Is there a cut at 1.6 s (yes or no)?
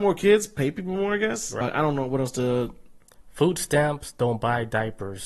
yes